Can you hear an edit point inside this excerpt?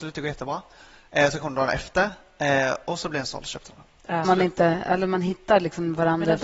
yes; 1 cut; at 4.2 s

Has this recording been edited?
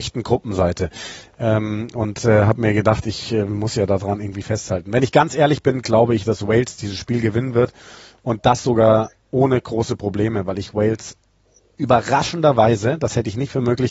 no; 0 cuts

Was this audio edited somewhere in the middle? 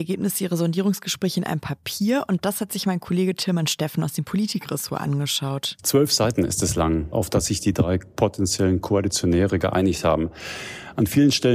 yes; 1 cut; at 7.1 s

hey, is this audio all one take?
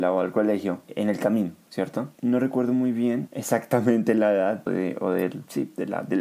no; 2 cuts; at 2.2 s, 4.7 s

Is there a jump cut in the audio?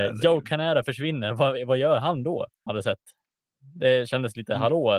yes; 1 cut; at 2.7 s

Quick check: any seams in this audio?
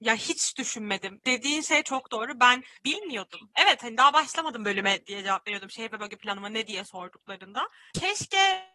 no; 0 cuts

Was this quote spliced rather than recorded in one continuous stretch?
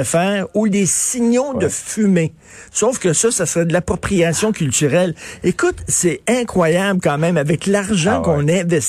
no; 0 cuts

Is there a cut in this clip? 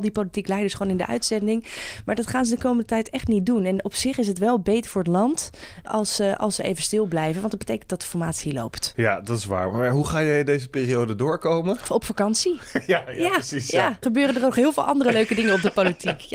yes; 2 cuts; at 5.9 s, 14.0 s

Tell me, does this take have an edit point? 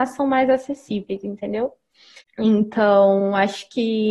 yes; 1 cut; at 2.2 s

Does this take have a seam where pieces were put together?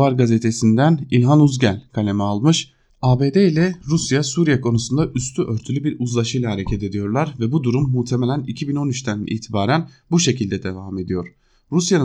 yes; 1 cut; at 2.9 s

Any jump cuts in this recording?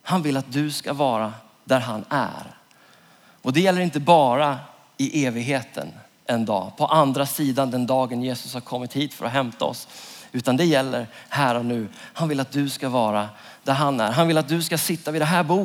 no; 0 cuts

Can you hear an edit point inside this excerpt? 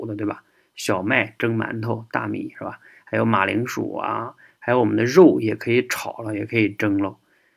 no; 0 cuts

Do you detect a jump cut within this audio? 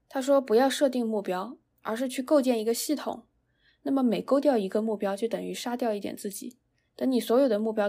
yes; 1 cut; at 3.7 s

